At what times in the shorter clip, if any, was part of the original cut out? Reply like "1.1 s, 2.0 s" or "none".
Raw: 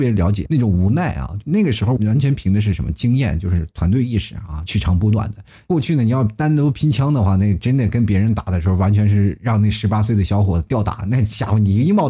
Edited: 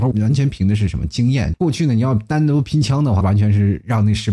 1.5 s, 3.2 s

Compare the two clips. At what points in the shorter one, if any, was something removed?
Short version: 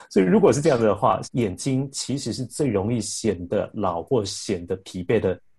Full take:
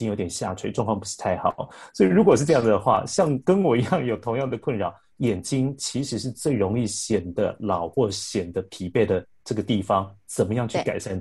1.2 s

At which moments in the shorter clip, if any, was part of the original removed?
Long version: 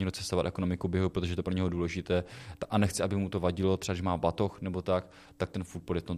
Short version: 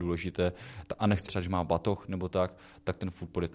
1.3 s

